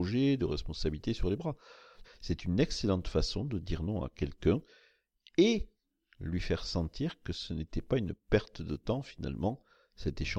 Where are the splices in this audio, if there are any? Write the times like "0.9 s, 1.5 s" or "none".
2.0 s